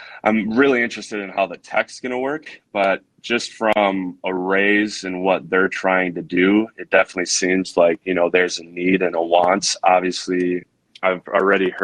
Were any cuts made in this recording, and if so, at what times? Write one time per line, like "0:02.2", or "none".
none